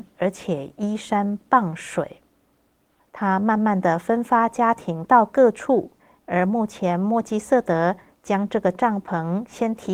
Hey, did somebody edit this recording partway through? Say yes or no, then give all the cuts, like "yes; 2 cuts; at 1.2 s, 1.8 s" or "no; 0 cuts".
yes; 2 cuts; at 3.0 s, 6.2 s